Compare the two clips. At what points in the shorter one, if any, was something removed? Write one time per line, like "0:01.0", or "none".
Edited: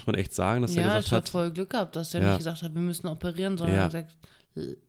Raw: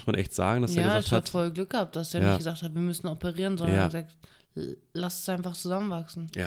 none